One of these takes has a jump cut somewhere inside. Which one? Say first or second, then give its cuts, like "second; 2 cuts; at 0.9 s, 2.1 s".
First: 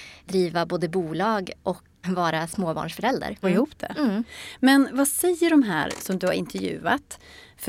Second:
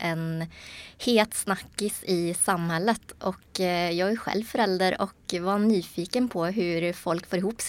first; 2 cuts; at 2.0 s, 3.4 s